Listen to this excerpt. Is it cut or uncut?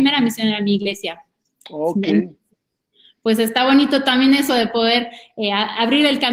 uncut